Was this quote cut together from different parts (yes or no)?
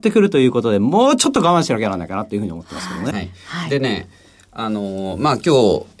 yes